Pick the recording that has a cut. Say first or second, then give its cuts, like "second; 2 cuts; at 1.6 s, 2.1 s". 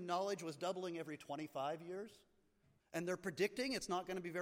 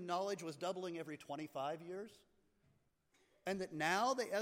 first; 1 cut; at 2.8 s